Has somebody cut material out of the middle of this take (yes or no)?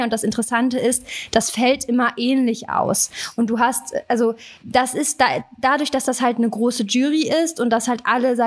yes